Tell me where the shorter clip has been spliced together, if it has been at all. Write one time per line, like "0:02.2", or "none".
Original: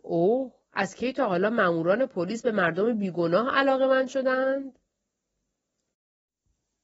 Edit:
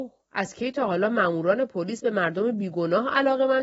none